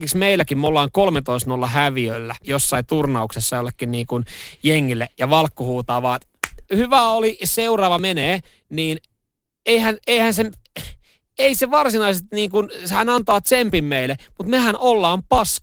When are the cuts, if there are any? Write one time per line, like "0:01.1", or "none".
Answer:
0:02.4
0:06.7